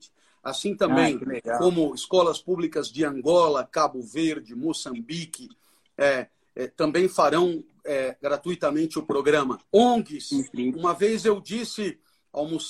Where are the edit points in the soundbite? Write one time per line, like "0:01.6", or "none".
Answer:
0:09.7
0:10.7